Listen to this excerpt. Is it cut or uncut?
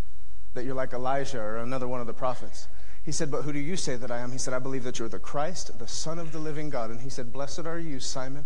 uncut